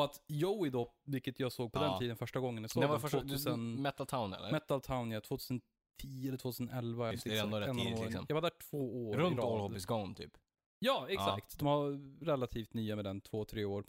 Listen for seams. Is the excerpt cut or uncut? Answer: cut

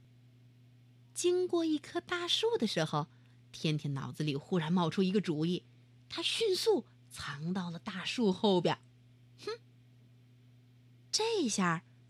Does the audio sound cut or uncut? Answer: uncut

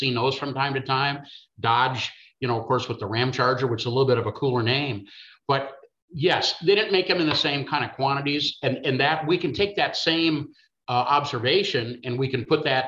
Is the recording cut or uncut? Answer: uncut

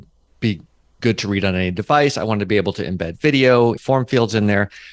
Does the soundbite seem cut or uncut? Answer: cut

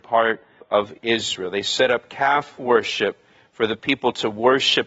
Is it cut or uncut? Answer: uncut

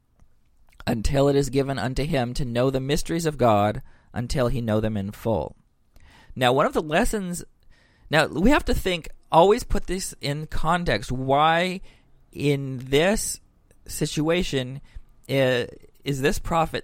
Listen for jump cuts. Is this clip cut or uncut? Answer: uncut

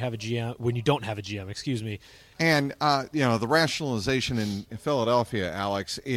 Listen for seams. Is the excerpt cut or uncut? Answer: cut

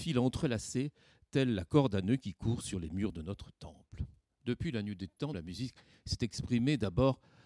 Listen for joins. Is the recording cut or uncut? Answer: cut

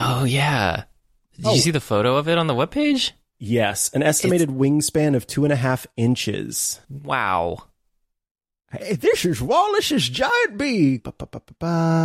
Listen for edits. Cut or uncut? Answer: cut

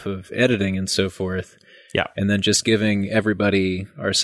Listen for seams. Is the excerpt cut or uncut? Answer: uncut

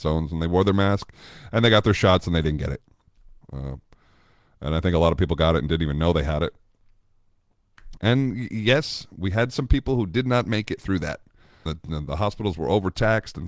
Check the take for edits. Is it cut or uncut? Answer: cut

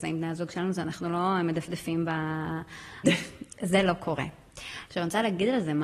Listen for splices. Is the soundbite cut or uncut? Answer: cut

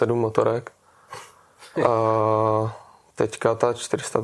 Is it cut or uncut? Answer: uncut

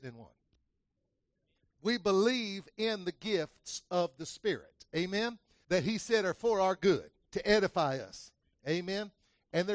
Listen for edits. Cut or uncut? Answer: cut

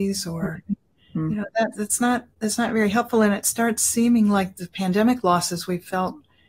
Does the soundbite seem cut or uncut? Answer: uncut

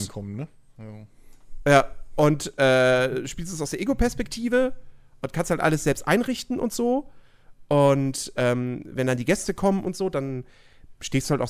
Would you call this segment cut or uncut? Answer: uncut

